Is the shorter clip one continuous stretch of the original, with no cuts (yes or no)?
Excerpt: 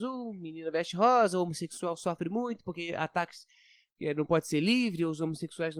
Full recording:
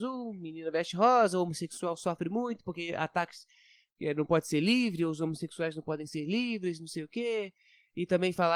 yes